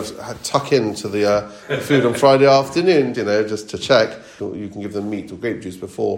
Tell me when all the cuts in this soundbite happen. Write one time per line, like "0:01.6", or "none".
0:03.1
0:04.4

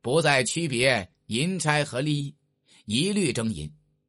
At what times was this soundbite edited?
none

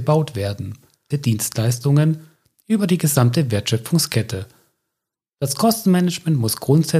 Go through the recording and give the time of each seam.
0:01.1

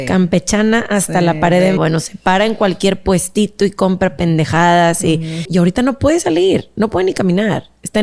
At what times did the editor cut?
0:01.8
0:05.5

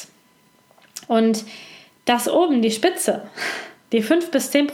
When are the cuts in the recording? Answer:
none

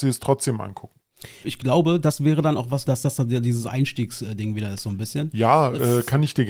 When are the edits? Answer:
0:01.4
0:02.9

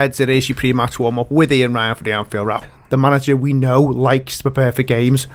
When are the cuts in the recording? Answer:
0:02.6

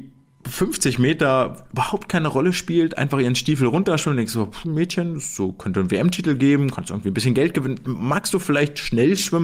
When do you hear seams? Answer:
0:04.6

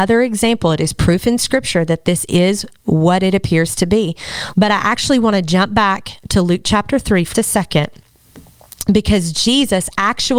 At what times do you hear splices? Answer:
0:04.5
0:07.3

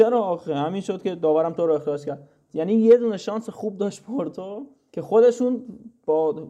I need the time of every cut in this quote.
none

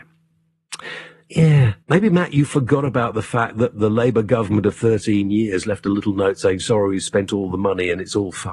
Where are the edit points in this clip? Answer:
0:01.8

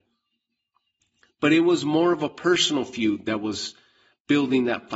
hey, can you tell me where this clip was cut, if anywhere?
none

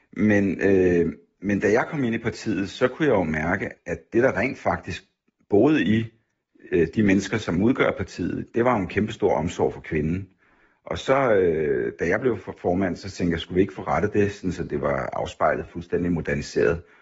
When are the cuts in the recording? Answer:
0:03.8

